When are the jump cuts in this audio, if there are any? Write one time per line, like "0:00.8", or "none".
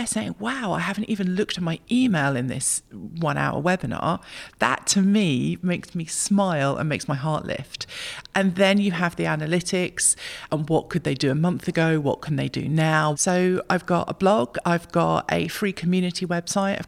0:10.5
0:13.1